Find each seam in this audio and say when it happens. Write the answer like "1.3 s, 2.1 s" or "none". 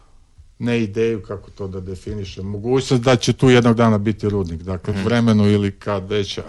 4.9 s